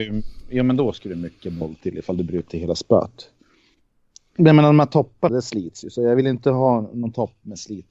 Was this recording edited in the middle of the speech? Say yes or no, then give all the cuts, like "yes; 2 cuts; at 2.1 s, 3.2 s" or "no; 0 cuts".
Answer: yes; 1 cut; at 5.3 s